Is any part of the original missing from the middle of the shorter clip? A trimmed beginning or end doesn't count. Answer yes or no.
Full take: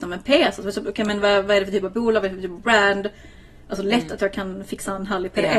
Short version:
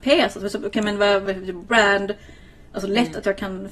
yes